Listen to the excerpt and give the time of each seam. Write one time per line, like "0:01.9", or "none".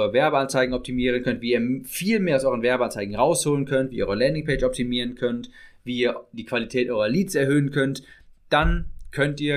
none